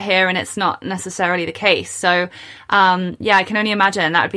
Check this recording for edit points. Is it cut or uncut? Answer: uncut